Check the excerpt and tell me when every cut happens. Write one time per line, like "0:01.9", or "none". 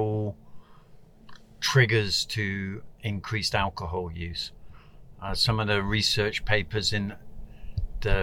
none